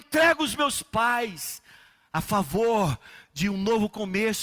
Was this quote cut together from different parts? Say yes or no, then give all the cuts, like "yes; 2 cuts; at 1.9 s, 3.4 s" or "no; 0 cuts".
yes; 1 cut; at 3.5 s